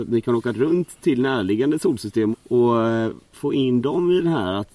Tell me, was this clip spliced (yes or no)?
yes